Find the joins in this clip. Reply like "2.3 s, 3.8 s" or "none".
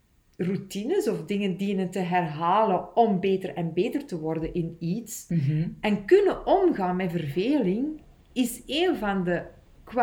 5.3 s